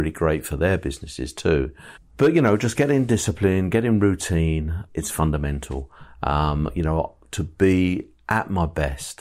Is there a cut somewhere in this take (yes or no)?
yes